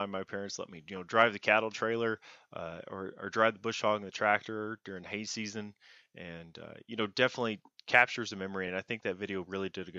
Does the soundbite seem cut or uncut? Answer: uncut